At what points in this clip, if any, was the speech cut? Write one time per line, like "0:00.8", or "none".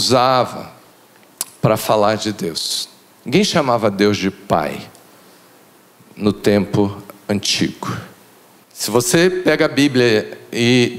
0:08.6